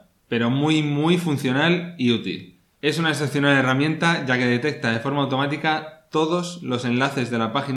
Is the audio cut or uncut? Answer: cut